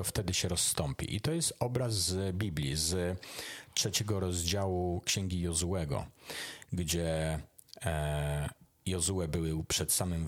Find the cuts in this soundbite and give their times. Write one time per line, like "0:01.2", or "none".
none

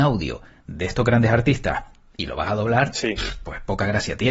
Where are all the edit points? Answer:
none

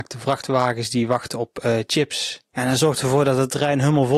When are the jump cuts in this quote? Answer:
0:02.5

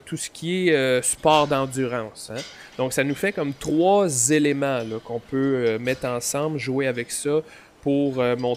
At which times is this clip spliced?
none

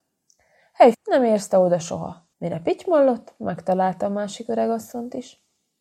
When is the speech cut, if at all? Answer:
0:00.9
0:02.3

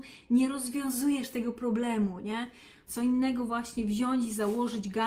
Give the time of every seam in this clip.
0:02.9

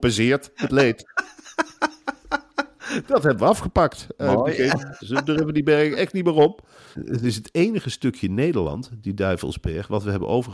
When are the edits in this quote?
0:03.0
0:05.0
0:06.9

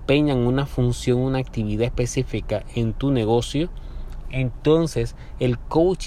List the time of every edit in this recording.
none

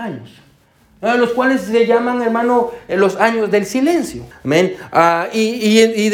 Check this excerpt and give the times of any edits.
0:04.3

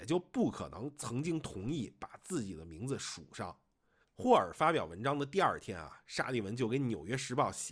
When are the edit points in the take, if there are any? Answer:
0:04.0

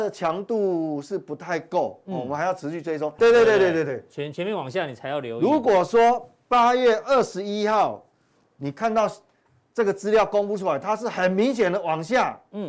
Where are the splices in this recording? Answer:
0:03.2

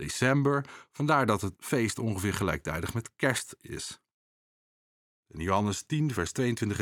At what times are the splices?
0:05.1

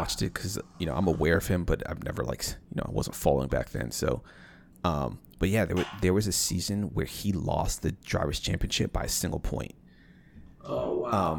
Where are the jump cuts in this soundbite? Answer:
none

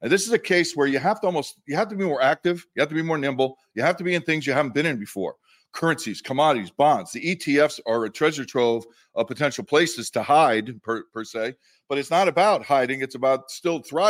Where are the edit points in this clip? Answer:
none

